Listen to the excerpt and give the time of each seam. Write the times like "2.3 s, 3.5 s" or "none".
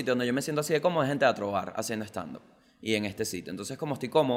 none